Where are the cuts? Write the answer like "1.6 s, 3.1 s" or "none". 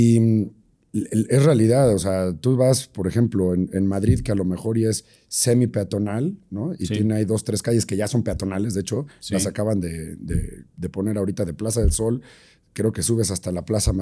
none